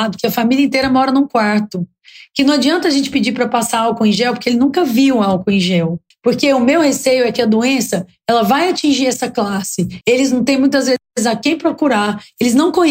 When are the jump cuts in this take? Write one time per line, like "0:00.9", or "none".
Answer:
0:06.1
0:10.0